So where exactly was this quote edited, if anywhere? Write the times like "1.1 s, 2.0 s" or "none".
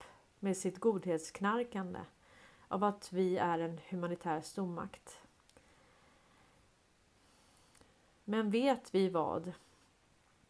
none